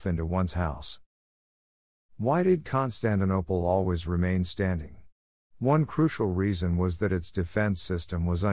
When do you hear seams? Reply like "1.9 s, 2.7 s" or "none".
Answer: none